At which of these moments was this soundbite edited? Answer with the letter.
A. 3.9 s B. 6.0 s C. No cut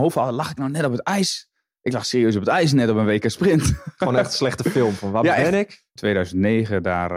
B